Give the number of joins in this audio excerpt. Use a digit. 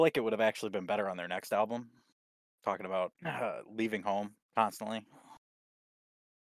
2